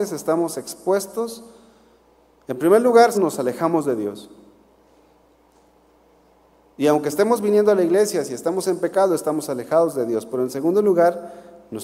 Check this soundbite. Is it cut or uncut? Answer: cut